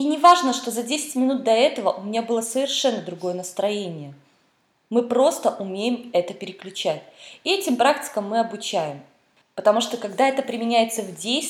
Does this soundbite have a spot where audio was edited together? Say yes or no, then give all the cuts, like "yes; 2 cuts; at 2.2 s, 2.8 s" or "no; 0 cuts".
yes; 1 cut; at 9.4 s